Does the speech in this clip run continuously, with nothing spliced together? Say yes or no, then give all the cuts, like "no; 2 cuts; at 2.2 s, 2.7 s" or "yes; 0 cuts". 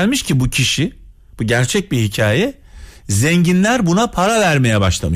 yes; 0 cuts